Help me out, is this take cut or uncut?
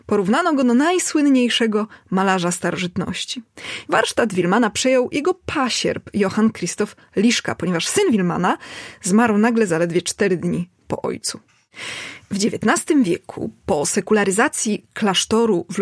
cut